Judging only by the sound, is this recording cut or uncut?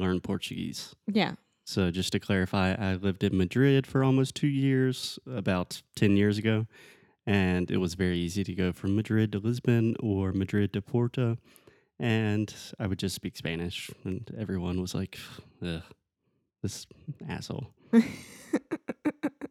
uncut